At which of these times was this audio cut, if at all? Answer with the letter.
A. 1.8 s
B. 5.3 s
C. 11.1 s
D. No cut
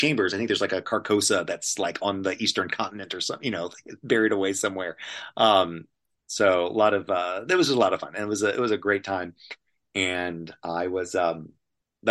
D